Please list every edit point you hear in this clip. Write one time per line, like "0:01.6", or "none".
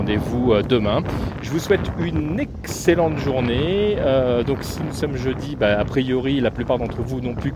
none

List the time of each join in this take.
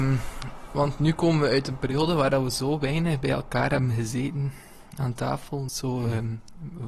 0:05.7

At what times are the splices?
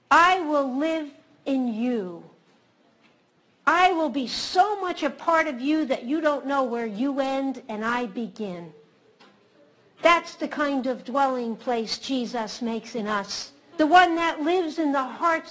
0:13.7

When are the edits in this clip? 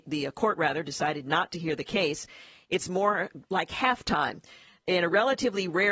none

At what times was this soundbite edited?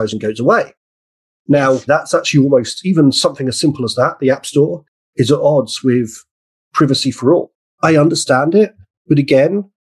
0:01.9
0:07.7

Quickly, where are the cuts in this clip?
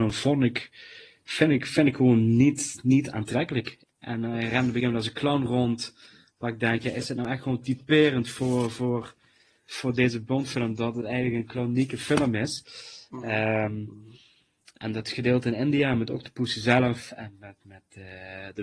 0:03.8

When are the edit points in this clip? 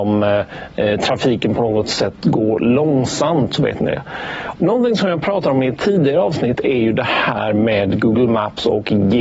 0:04.6

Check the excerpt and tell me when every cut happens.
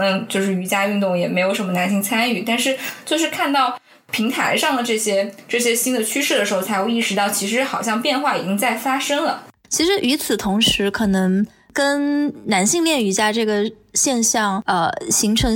none

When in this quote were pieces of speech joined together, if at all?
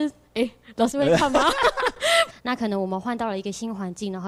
0:02.3

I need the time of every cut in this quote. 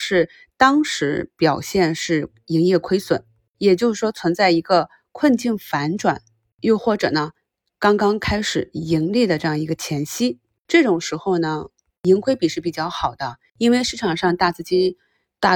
none

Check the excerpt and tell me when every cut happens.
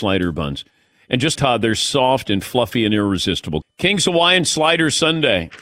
0:01.4
0:03.6

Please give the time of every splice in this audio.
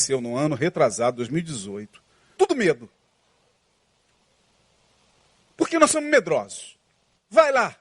0:02.4

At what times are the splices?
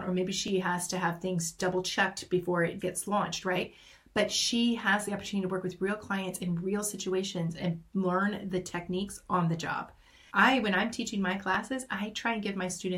0:02.8
0:10.3

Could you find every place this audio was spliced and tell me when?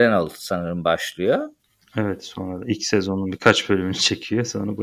none

